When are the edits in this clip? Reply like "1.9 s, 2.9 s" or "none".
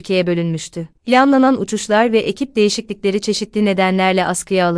1.0 s